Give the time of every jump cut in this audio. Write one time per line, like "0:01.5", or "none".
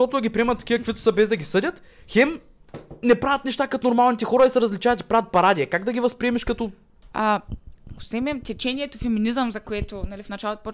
0:07.1

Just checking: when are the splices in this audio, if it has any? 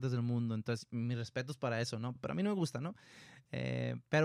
none

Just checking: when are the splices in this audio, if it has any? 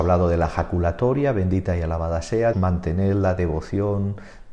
0:02.5

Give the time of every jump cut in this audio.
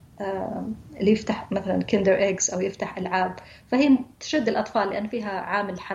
0:04.1

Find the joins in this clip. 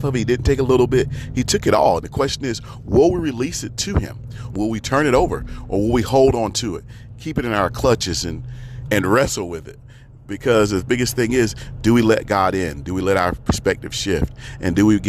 0:04.5
0:08.9

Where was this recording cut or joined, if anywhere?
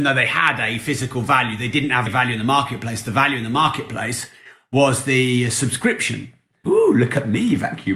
0:02.1
0:06.6

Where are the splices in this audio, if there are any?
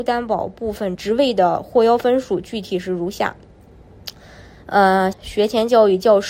0:01.0
0:05.1

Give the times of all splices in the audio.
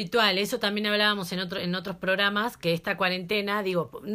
none

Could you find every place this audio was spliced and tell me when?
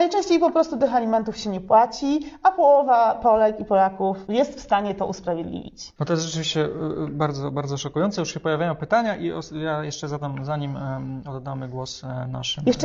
none

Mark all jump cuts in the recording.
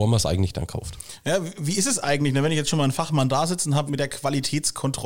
0:03.9

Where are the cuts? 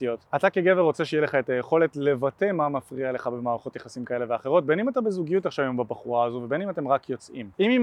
none

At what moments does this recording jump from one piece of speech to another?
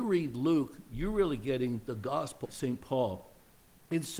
0:02.4

